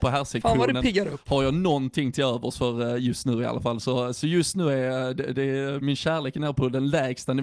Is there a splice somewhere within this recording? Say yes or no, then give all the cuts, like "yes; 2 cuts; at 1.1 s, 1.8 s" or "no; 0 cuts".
no; 0 cuts